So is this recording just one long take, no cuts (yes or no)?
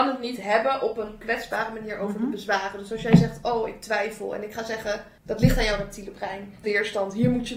no